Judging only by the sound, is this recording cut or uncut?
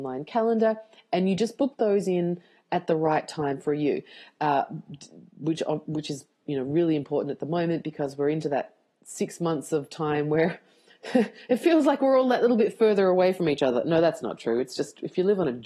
uncut